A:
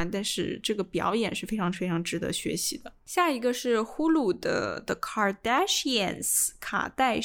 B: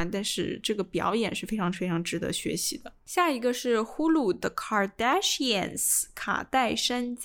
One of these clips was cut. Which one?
B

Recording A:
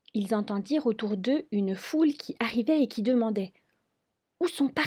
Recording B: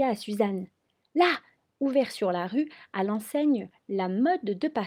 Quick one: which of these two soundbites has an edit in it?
B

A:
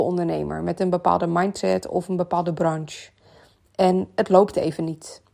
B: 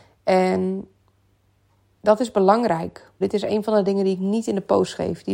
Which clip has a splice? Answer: B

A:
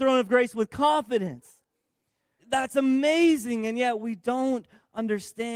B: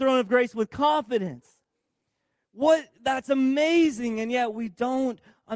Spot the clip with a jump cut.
A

